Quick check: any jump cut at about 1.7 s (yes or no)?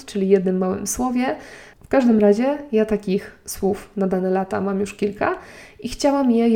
yes